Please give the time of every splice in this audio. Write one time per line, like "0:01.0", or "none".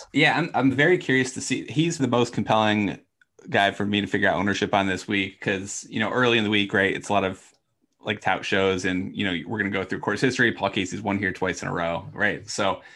0:02.0